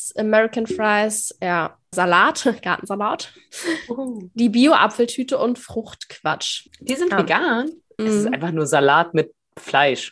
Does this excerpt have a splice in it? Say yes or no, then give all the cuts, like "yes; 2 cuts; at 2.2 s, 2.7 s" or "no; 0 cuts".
yes; 3 cuts; at 1.9 s, 6.7 s, 8.0 s